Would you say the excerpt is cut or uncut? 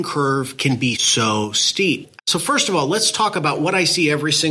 cut